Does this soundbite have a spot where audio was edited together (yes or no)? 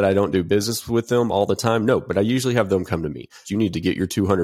yes